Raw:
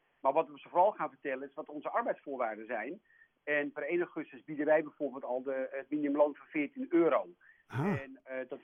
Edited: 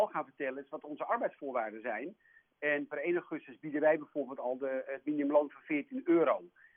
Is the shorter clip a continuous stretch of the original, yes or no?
yes